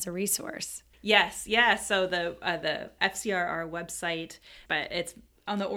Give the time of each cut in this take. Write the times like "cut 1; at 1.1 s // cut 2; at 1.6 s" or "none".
cut 1; at 0.9 s // cut 2; at 3.0 s // cut 3; at 4.7 s